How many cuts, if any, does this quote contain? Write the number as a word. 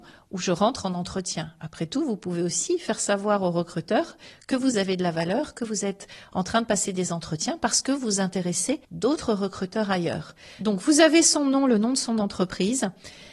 one